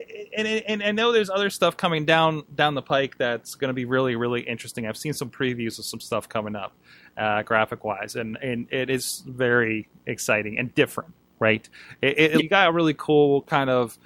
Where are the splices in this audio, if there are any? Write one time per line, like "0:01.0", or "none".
0:12.4